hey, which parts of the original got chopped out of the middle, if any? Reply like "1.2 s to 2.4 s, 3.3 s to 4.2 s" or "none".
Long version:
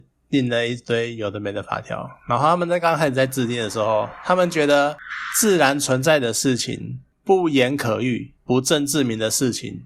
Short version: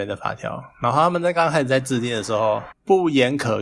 4.2 s to 7.1 s